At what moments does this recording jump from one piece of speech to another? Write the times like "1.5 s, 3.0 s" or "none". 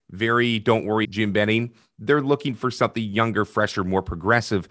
1.0 s